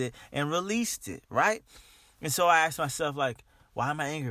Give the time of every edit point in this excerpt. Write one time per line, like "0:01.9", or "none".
none